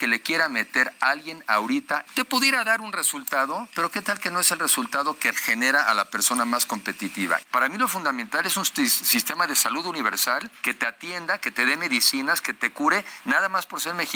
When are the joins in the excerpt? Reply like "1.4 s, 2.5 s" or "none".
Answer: 2.1 s, 5.3 s, 7.4 s